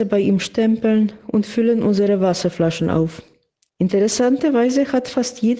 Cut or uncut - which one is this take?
cut